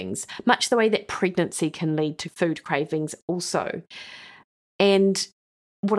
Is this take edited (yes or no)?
no